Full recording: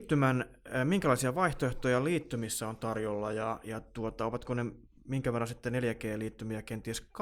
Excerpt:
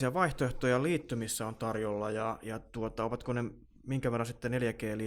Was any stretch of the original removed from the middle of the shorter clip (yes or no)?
no